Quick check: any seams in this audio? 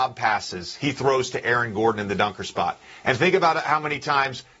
no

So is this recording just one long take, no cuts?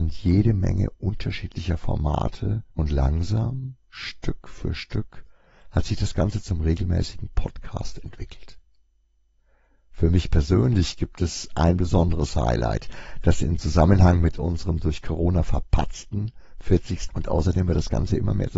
no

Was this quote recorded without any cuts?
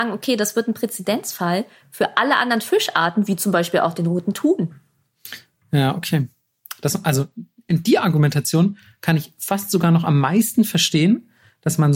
yes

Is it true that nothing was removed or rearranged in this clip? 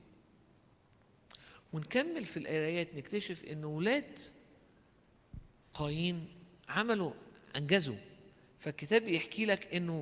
yes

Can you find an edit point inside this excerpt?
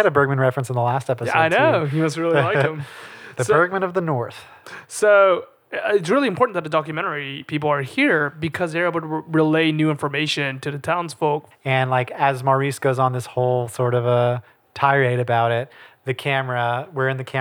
yes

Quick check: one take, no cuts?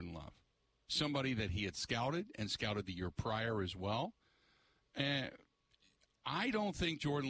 yes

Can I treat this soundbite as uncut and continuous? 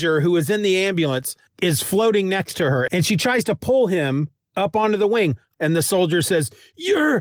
no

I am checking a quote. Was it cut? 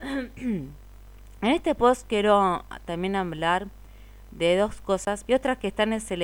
yes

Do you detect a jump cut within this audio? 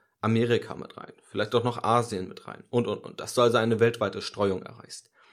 no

